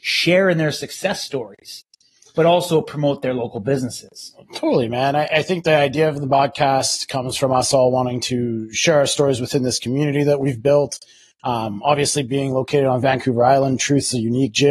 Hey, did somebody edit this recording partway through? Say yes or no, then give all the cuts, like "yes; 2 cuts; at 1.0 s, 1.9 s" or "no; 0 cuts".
no; 0 cuts